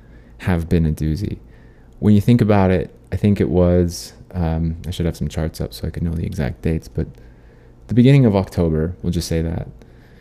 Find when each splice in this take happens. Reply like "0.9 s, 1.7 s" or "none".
none